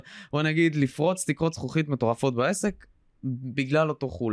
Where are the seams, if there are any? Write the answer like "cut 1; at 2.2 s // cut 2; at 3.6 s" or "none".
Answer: none